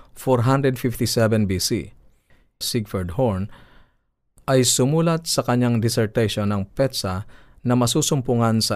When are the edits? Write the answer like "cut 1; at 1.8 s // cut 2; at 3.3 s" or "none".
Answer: cut 1; at 2.6 s